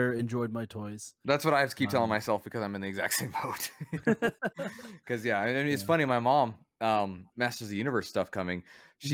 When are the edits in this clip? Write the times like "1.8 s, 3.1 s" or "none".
7.3 s